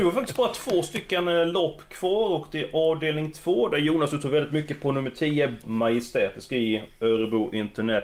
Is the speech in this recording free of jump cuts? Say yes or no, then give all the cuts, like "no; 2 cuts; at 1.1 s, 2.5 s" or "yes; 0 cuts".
no; 1 cut; at 5.6 s